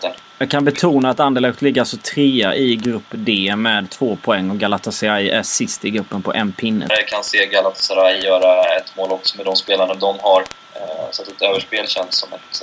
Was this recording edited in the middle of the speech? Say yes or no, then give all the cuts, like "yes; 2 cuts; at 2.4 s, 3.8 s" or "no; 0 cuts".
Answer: yes; 1 cut; at 6.9 s